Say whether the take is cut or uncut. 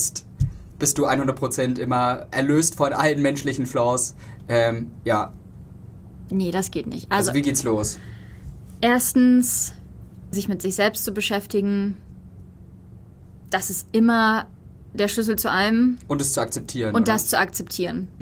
cut